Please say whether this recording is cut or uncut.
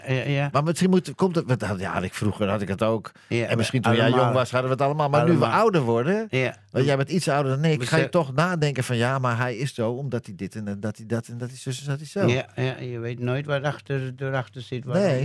uncut